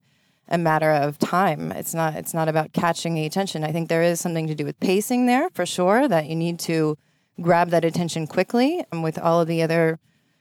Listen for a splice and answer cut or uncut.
uncut